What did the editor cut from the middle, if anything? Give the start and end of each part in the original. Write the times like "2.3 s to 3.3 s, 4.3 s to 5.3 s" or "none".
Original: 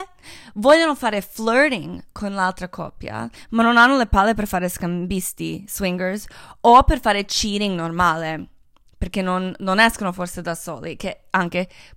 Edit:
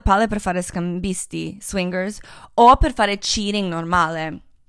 none